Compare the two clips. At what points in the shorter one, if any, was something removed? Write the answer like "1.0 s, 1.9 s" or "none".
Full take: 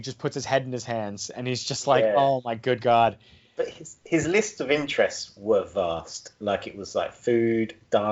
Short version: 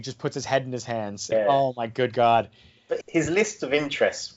1.3 s, 3.0 s